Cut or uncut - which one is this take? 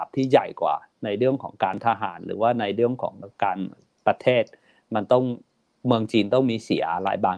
cut